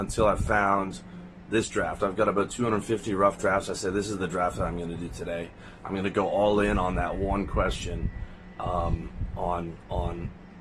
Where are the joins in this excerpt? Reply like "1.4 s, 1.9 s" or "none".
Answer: none